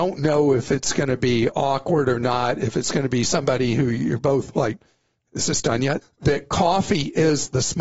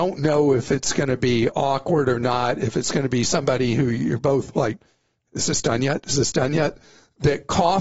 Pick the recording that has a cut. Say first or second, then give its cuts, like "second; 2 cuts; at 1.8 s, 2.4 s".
first; 1 cut; at 6.0 s